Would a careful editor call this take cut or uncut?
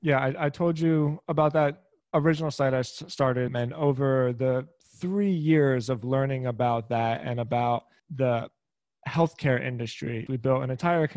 cut